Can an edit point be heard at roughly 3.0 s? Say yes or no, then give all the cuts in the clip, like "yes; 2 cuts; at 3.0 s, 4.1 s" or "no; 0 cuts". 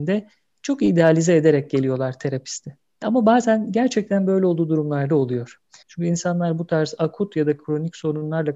yes; 2 cuts; at 3.0 s, 5.8 s